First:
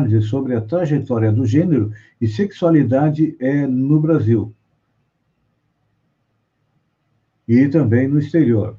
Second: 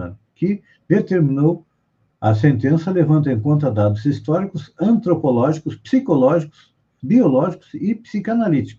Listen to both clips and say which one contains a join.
second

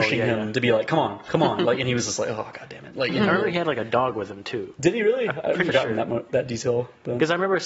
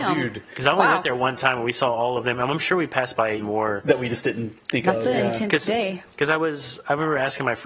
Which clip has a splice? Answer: second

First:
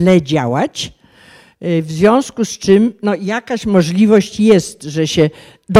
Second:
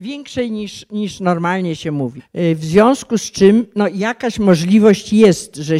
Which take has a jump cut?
second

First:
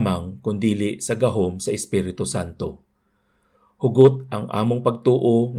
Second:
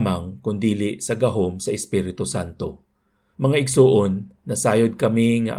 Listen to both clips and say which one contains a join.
second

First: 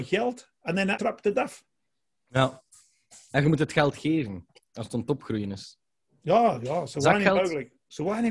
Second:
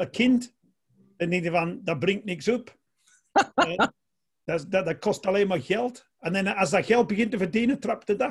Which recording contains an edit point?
first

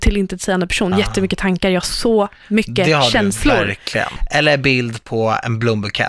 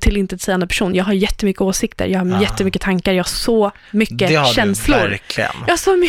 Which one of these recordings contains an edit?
first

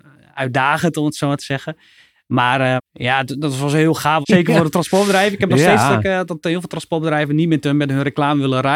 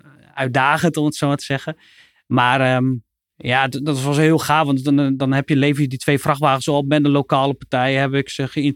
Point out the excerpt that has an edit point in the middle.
first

